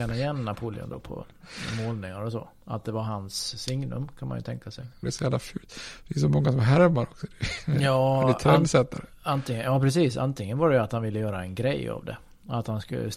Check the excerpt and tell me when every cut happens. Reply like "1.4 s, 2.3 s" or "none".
5.0 s